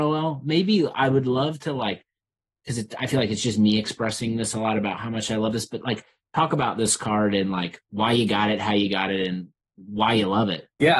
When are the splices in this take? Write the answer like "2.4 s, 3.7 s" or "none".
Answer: none

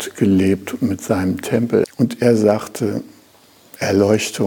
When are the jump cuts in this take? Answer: 1.8 s

